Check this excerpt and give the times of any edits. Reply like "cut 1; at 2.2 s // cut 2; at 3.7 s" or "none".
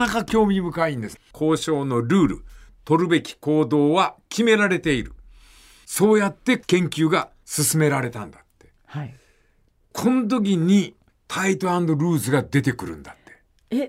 cut 1; at 1.2 s // cut 2; at 11.1 s